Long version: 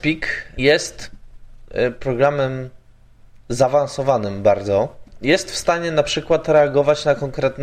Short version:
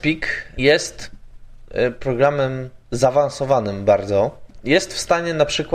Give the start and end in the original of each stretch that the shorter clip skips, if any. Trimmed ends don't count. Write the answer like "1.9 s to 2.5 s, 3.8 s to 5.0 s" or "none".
2.8 s to 3.4 s